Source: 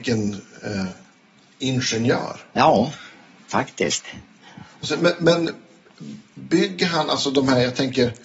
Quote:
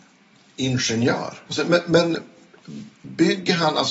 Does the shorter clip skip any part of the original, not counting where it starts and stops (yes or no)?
yes